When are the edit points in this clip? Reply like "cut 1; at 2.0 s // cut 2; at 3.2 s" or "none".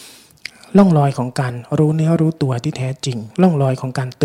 cut 1; at 3.3 s